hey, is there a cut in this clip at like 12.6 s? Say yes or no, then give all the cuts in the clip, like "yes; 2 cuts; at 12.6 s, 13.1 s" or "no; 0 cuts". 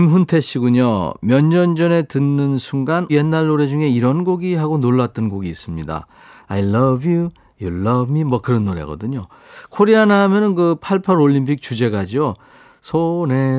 no; 2 cuts; at 3.1 s, 6.4 s